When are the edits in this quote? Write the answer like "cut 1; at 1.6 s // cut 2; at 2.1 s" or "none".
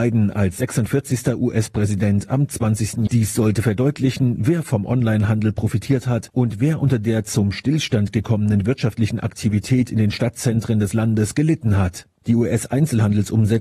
cut 1; at 3.1 s // cut 2; at 12.1 s